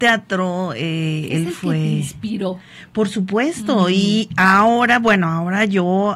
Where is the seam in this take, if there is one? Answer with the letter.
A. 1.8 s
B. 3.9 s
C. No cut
C